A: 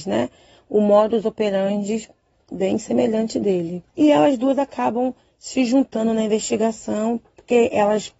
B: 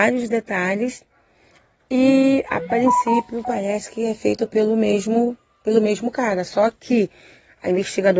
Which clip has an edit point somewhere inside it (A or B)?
A